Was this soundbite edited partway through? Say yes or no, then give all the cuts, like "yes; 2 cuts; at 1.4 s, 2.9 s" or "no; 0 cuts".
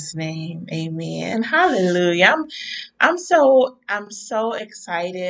no; 0 cuts